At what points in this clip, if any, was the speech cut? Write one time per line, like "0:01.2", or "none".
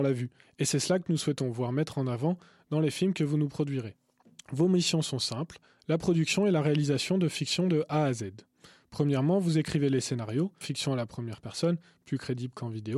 0:10.6